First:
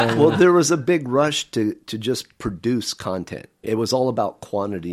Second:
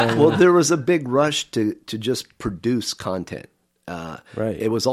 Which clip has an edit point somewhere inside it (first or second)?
first